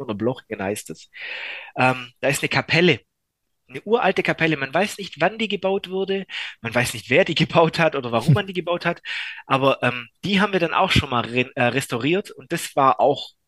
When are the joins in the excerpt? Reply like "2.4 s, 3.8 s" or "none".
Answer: none